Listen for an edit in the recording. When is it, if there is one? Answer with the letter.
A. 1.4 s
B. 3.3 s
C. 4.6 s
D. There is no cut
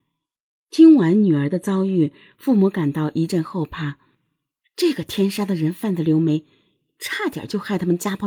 B